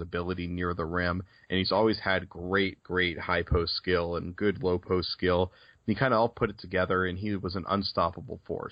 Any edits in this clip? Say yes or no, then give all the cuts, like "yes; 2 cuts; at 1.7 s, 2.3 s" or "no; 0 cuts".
no; 0 cuts